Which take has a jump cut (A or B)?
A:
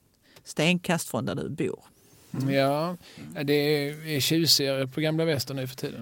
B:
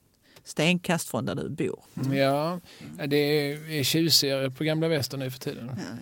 B